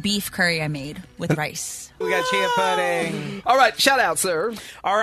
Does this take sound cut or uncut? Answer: cut